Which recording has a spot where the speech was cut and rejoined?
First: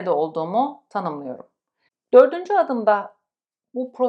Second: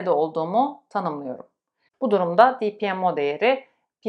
second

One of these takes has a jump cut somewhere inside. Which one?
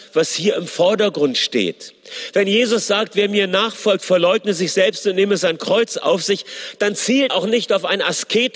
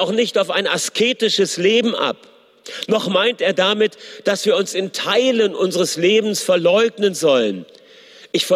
first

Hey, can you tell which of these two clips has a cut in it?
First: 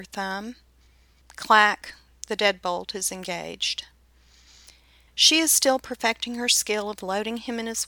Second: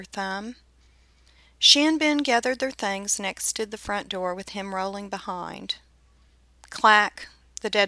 first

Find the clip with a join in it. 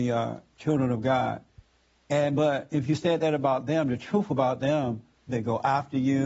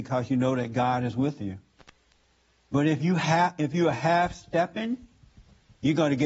first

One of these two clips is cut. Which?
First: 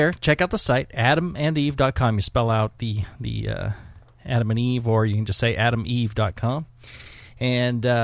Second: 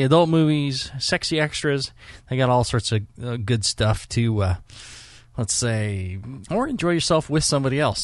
second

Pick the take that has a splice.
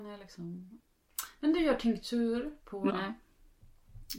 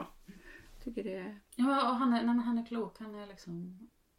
first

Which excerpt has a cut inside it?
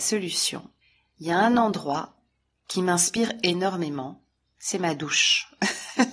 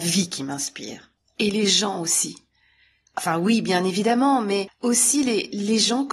second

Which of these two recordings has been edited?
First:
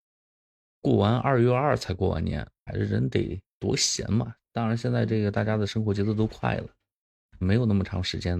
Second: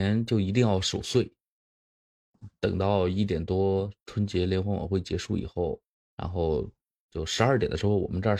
first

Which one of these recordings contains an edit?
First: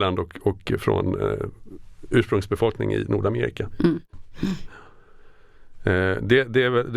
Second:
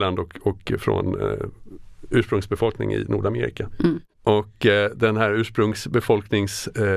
first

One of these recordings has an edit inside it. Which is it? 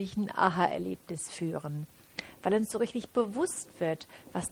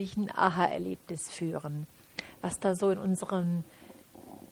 second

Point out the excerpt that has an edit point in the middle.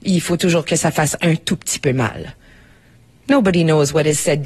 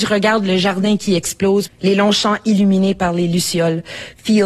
second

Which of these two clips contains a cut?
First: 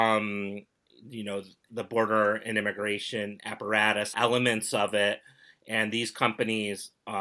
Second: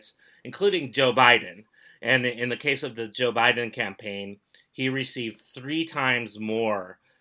first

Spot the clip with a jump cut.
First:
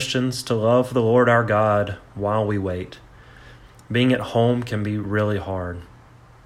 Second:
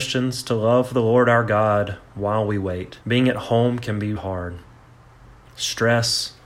second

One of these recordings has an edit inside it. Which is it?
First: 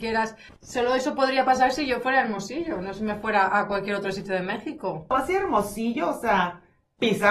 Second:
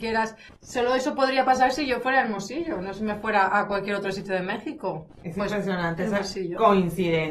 first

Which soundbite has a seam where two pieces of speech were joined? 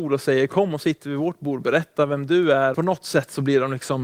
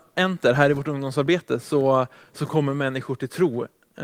first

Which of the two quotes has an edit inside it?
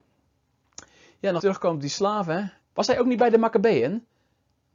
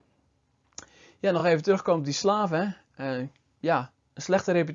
first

